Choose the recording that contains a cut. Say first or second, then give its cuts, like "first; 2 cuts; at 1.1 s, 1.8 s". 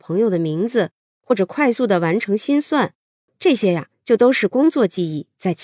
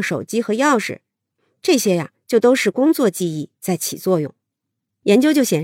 first; 1 cut; at 3.3 s